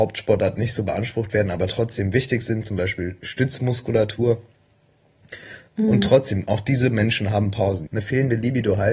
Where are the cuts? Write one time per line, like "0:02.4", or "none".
0:05.7
0:07.9